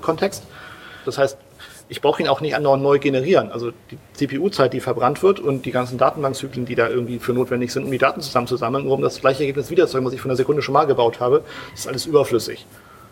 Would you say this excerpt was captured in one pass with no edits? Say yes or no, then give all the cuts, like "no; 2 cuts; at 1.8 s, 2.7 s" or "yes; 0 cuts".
no; 1 cut; at 1.0 s